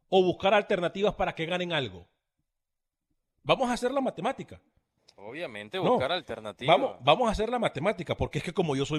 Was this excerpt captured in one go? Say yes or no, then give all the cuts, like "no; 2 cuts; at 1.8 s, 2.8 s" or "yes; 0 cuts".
yes; 0 cuts